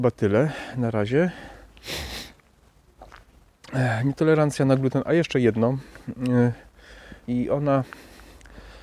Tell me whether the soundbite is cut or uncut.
cut